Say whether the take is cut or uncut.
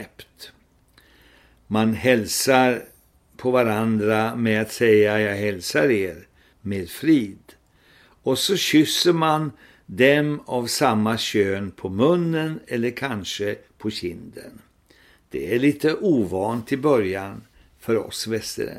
cut